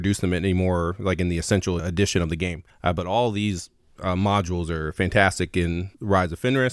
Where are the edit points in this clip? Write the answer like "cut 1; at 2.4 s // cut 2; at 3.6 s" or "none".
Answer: cut 1; at 1.8 s